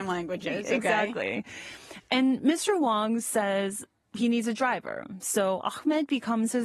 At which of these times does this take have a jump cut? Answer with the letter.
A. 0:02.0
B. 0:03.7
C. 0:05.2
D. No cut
D